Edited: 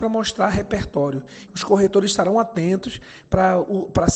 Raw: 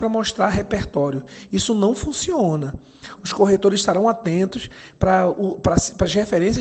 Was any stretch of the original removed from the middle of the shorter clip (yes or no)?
yes